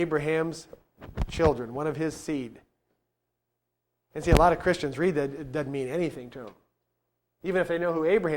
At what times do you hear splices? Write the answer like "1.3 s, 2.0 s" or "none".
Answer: none